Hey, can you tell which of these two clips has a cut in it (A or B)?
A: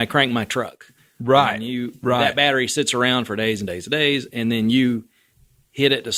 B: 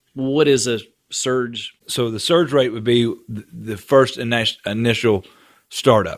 B